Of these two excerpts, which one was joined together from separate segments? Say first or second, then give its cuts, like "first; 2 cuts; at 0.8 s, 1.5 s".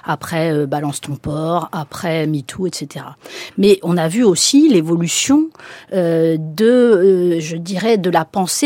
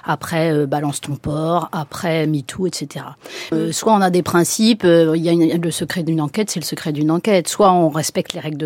second; 1 cut; at 3.5 s